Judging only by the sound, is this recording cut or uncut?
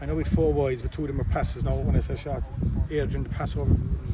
cut